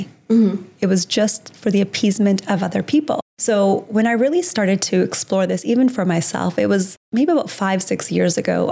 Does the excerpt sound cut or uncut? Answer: uncut